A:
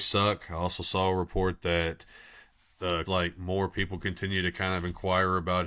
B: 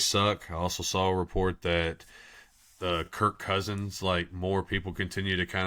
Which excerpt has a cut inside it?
A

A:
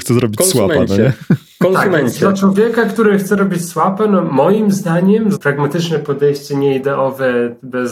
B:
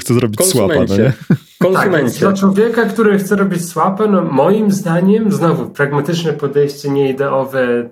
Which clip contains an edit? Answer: A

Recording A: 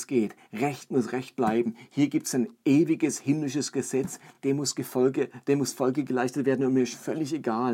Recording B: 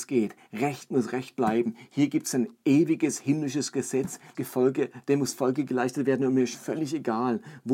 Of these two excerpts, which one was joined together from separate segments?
B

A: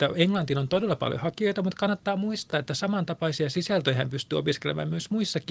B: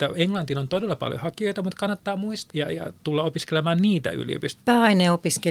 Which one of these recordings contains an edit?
B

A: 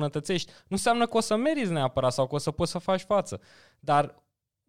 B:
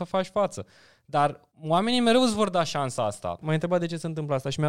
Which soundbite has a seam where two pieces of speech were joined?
B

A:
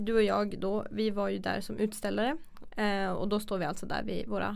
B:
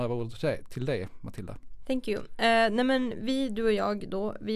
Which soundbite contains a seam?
A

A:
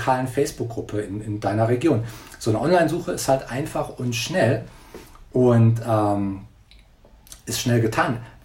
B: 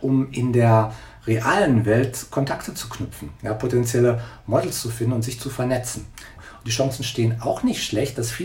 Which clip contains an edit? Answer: B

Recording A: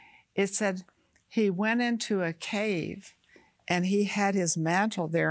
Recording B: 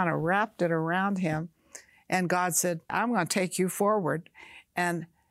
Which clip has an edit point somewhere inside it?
B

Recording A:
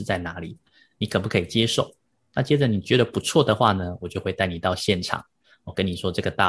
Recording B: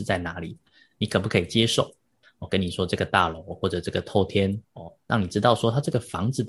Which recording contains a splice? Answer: B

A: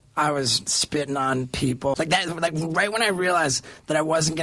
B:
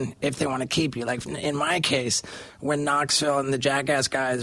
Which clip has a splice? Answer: A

